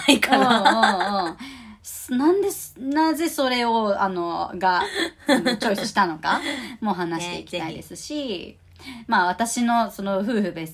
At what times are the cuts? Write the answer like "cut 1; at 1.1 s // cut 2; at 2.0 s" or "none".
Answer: none

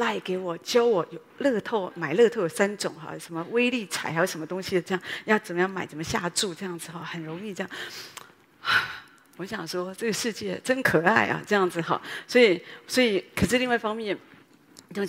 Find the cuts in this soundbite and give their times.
none

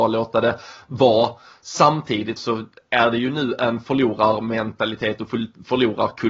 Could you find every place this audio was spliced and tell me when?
cut 1; at 2.4 s

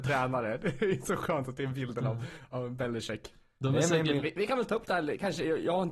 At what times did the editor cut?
cut 1; at 4.2 s

